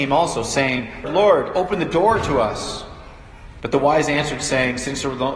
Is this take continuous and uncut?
no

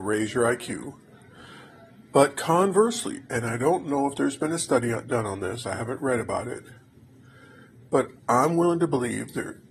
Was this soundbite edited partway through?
no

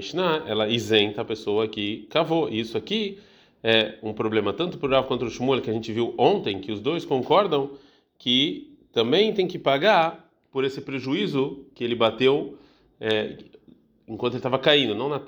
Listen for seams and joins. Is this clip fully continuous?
yes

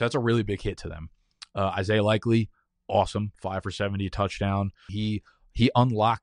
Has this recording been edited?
yes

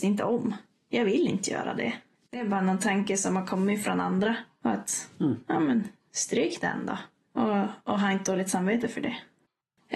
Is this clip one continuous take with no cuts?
yes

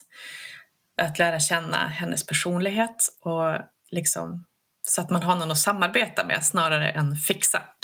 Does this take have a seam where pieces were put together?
no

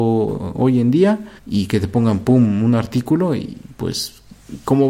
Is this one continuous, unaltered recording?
no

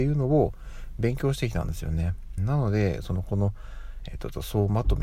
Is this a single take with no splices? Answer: no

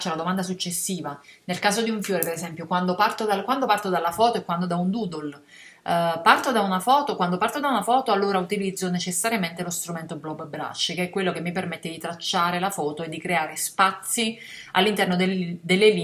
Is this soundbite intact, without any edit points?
yes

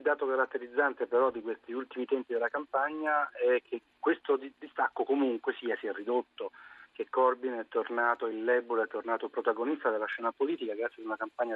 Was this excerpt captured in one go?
yes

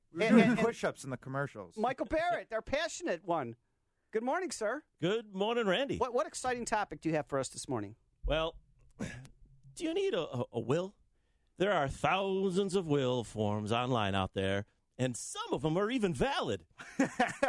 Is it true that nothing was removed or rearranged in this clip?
yes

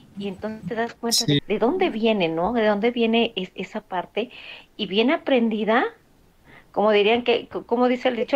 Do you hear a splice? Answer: yes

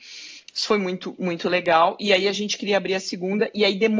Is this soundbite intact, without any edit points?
yes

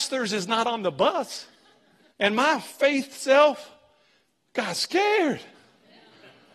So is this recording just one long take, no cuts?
no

